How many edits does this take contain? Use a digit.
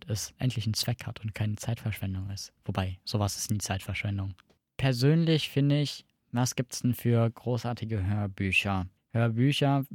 0